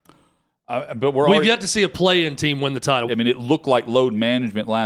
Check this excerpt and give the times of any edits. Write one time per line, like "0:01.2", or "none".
0:03.1